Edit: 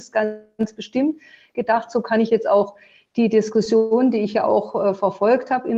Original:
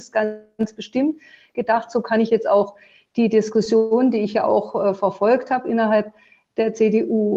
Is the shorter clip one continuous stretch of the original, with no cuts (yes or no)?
yes